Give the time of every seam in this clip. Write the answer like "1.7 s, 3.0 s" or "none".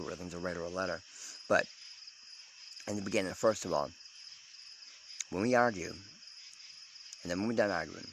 3.3 s